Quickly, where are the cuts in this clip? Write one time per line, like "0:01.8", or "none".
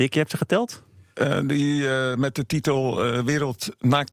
0:01.1